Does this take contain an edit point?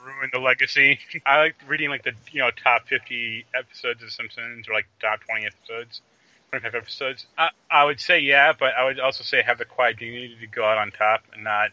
yes; 2 cuts; at 1.2 s, 7.3 s

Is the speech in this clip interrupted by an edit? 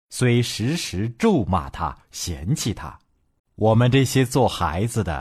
yes; 1 cut; at 3.4 s

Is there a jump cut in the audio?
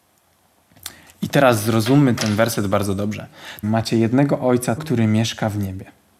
yes; 2 cuts; at 3.6 s, 4.8 s

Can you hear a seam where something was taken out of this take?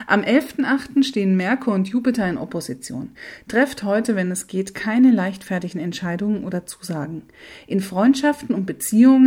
no; 0 cuts

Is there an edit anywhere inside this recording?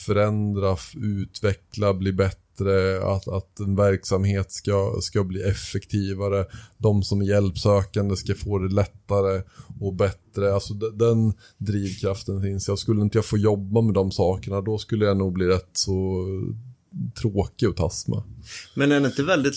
no; 0 cuts

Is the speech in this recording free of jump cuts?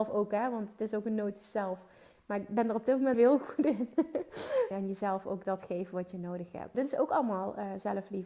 no; 3 cuts; at 3.1 s, 4.7 s, 6.7 s

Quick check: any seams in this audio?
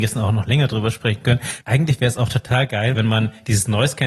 yes; 2 cuts; at 1.6 s, 2.9 s

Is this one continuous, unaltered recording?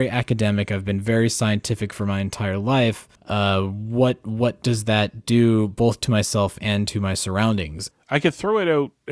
no; 2 cuts; at 3.1 s, 7.9 s

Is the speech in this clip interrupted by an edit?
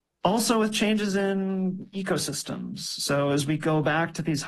no; 0 cuts

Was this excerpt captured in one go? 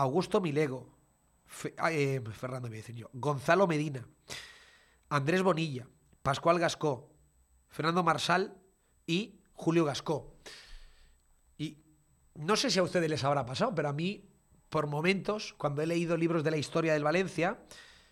yes; 0 cuts

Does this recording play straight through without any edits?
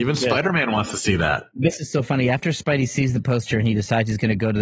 yes; 0 cuts

